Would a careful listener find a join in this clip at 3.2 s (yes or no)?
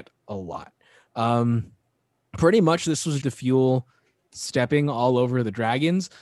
yes